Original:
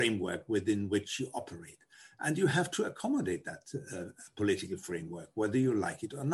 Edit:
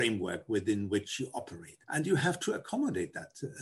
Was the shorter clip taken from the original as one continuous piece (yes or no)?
no